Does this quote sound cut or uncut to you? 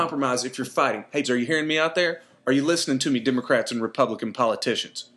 cut